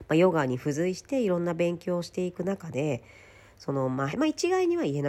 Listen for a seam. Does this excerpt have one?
yes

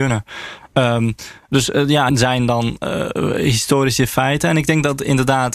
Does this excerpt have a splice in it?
yes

